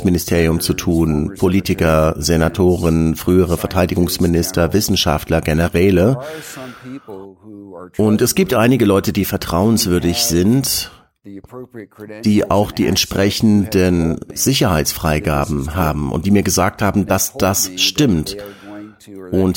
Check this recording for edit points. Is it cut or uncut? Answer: uncut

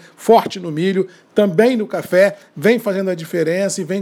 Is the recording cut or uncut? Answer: uncut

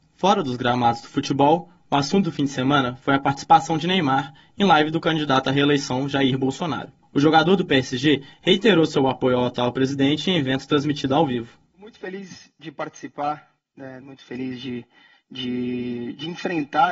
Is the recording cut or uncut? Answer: cut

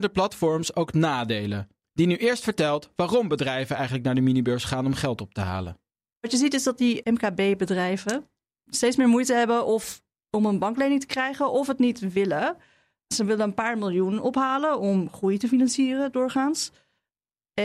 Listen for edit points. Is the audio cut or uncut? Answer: cut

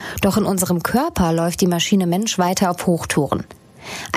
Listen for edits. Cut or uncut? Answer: uncut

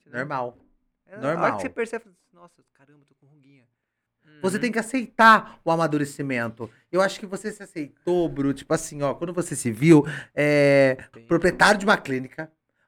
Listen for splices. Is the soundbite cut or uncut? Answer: cut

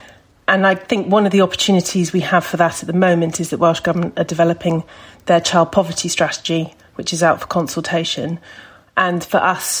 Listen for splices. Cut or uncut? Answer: cut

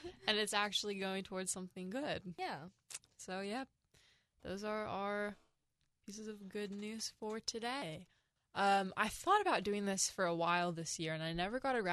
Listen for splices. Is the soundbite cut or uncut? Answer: uncut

